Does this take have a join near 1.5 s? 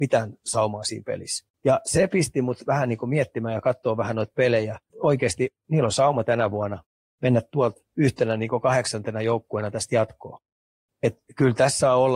yes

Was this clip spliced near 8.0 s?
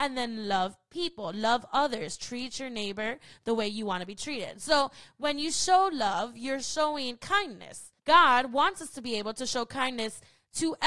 yes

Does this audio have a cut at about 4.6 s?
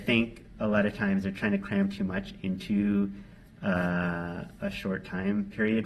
no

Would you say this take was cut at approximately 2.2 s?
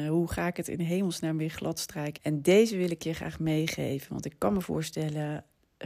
yes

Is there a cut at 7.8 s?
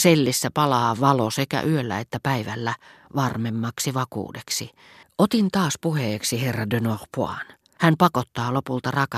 yes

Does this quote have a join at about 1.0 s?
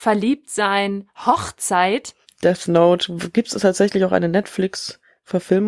no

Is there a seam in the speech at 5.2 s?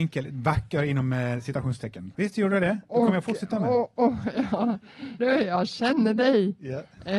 yes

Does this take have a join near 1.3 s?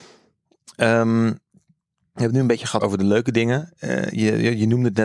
no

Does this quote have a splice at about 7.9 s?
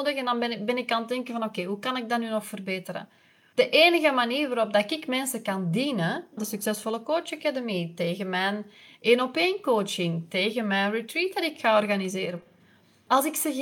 no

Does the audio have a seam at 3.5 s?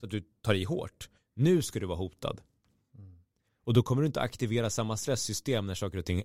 yes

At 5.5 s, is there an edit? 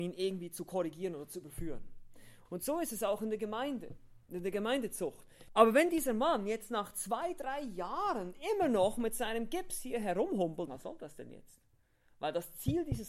yes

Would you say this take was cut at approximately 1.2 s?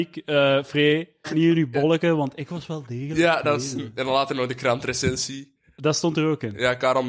yes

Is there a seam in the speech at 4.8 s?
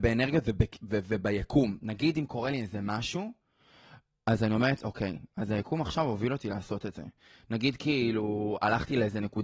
no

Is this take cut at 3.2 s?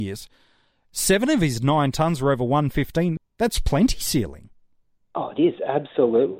yes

